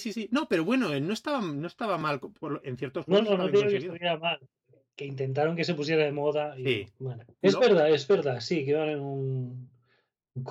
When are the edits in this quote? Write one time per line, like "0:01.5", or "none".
0:07.4